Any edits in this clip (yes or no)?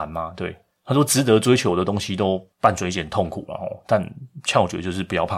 yes